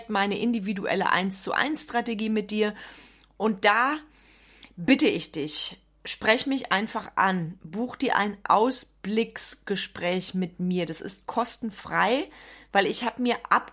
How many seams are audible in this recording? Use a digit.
0